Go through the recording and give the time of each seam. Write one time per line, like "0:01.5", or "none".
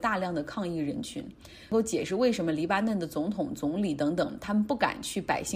none